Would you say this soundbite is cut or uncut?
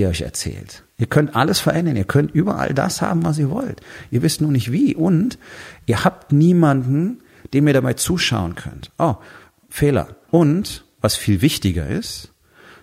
cut